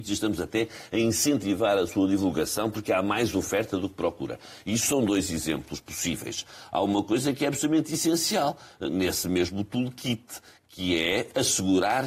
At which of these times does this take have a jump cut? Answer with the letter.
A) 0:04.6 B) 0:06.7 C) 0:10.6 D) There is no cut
D